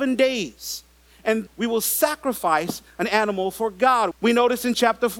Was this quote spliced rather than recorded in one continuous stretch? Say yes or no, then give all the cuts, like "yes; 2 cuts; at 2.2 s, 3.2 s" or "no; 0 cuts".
yes; 2 cuts; at 1.5 s, 4.1 s